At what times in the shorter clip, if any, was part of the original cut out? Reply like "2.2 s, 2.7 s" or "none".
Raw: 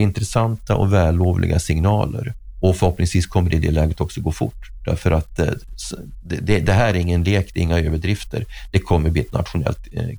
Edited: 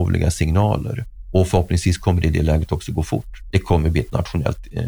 3.5 s